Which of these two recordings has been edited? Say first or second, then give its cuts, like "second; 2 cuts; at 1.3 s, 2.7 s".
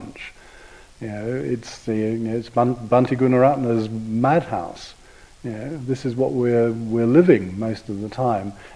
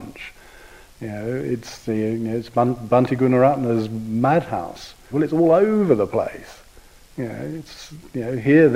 second; 1 cut; at 5.1 s